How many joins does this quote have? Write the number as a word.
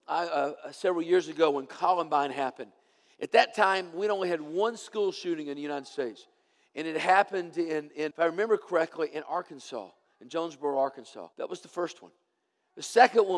two